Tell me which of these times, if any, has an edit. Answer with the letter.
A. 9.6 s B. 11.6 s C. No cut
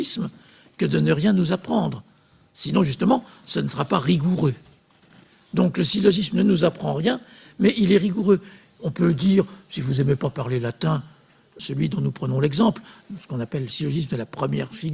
B